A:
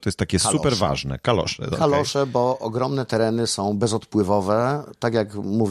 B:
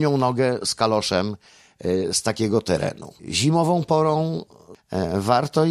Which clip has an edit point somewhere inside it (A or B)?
B